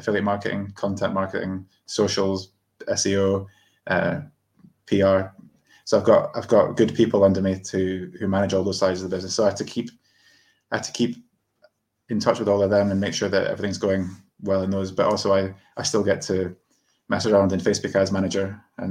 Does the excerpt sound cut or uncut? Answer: uncut